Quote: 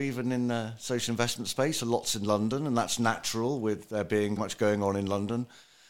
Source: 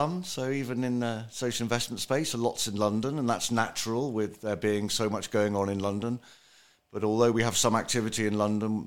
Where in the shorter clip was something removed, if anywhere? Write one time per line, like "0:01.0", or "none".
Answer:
0:04.4